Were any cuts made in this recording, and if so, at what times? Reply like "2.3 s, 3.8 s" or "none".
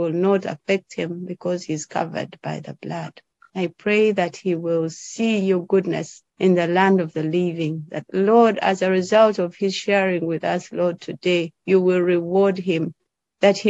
3.5 s, 6.3 s